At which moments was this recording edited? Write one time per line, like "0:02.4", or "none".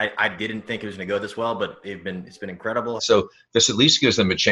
0:03.0